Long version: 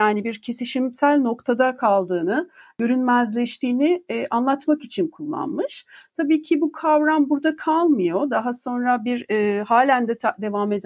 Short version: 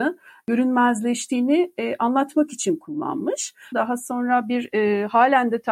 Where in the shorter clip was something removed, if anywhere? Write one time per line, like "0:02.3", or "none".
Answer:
0:03.7